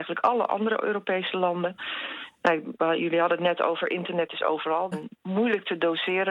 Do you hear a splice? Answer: yes; 2 cuts; at 2.8 s, 4.9 s

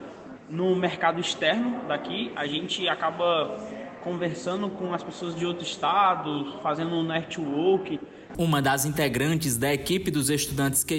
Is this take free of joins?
no; 1 cut; at 8.3 s

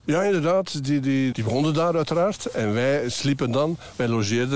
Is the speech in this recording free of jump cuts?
no; 1 cut; at 1.3 s

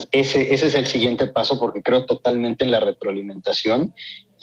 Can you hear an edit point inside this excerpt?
no; 0 cuts

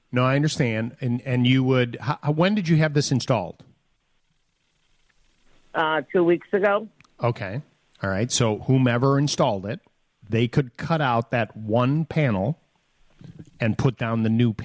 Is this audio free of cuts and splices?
yes; 0 cuts

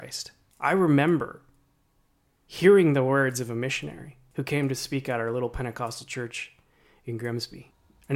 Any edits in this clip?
no; 0 cuts

